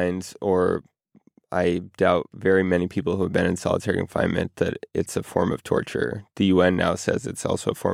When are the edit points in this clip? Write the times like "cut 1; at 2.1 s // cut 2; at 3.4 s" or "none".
none